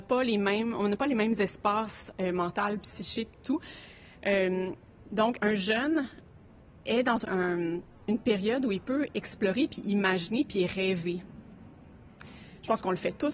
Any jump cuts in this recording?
yes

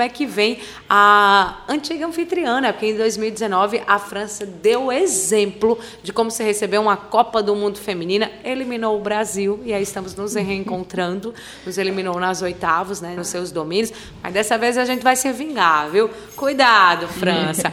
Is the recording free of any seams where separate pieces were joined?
no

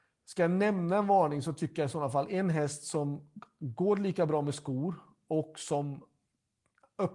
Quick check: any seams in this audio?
no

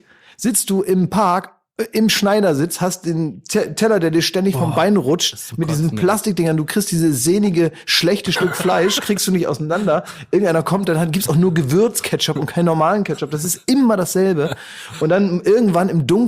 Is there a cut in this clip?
no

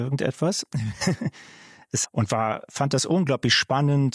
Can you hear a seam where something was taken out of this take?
yes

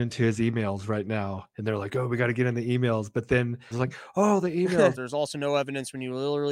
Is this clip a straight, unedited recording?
no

